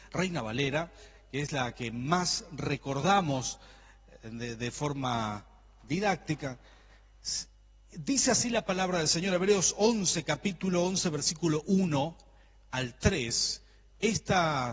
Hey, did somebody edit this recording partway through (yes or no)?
no